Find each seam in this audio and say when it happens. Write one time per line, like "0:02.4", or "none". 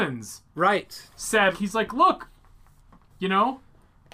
0:01.5